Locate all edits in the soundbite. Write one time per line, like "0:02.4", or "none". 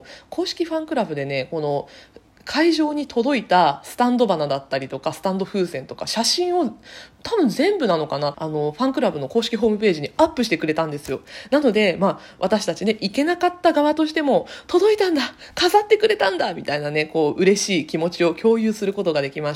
0:08.3